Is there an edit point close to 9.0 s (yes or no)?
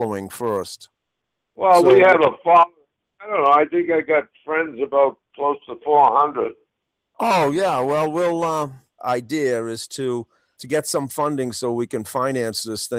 yes